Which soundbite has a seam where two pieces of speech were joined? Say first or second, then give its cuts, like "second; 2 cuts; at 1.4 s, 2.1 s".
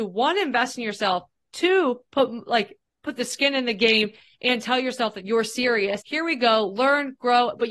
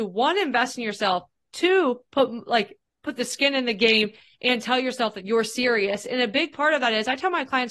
first; 1 cut; at 6.0 s